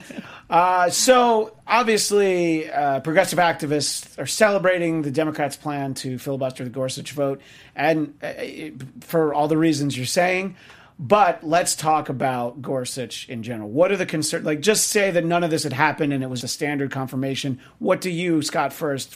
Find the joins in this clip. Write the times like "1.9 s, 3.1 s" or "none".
16.4 s